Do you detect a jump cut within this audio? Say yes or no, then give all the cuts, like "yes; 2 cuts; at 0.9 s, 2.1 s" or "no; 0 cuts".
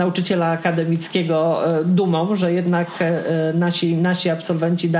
no; 0 cuts